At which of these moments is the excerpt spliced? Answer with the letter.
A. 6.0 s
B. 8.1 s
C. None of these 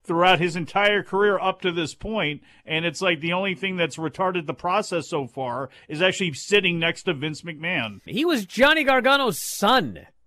B